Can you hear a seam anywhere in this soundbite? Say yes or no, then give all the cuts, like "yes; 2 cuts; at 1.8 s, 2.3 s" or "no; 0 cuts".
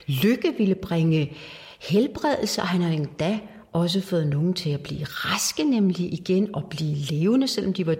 no; 0 cuts